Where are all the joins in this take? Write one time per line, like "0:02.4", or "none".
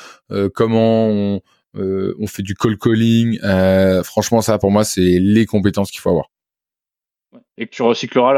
none